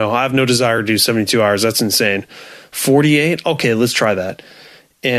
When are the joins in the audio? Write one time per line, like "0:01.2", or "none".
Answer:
none